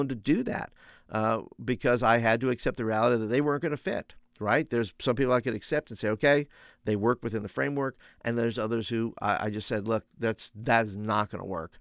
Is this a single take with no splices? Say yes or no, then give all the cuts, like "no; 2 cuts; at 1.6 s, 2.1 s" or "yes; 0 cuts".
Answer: yes; 0 cuts